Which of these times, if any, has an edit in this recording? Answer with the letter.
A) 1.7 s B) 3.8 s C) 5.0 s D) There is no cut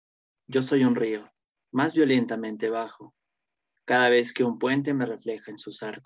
A